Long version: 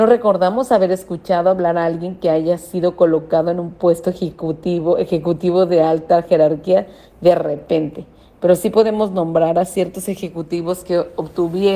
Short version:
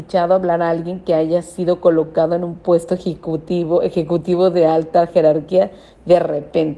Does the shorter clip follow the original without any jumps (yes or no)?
yes